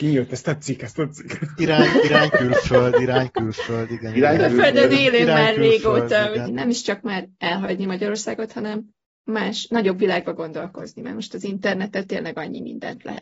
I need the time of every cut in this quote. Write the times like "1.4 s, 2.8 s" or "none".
6.5 s